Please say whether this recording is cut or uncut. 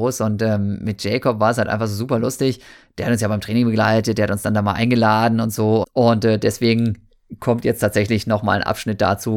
cut